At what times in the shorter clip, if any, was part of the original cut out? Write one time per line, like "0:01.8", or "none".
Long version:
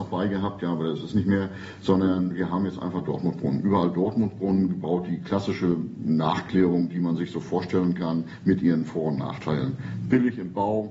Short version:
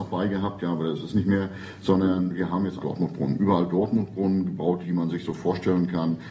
0:02.8
0:04.8